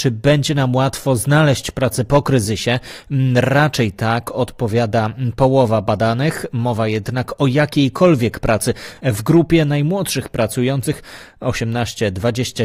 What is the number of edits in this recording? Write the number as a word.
zero